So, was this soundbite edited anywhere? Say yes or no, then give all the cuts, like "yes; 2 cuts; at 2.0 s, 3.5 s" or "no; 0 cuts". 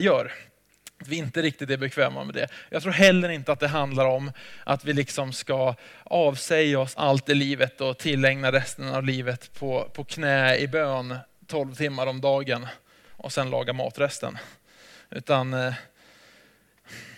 no; 0 cuts